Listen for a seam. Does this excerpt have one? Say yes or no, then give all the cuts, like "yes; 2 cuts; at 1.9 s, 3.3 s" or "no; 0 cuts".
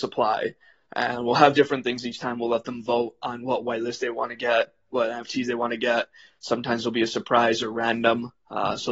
no; 0 cuts